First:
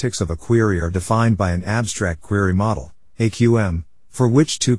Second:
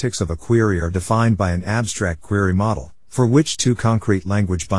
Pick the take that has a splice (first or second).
second